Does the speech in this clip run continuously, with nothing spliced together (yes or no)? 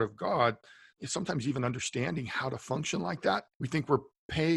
no